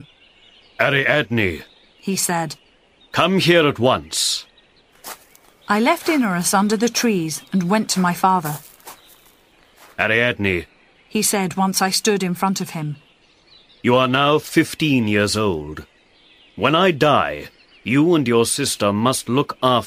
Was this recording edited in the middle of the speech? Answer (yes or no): no